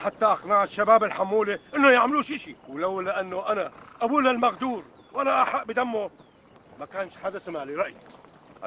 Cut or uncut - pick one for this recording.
cut